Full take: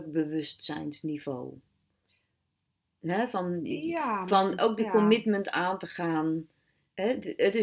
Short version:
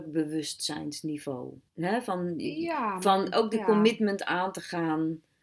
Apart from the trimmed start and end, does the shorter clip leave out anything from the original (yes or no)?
yes